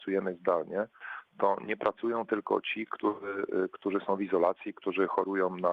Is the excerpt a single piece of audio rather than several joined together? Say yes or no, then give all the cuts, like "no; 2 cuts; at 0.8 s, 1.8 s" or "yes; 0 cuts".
yes; 0 cuts